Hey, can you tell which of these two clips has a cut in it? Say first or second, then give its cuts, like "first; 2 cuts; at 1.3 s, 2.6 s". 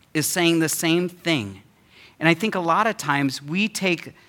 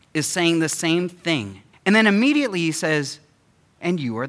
second; 1 cut; at 1.7 s